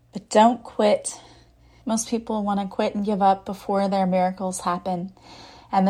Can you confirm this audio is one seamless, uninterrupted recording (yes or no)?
no